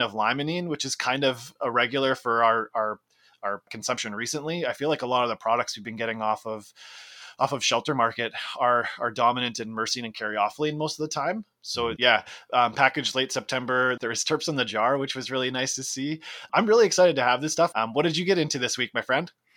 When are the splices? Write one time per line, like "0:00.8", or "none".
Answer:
0:12.0
0:17.7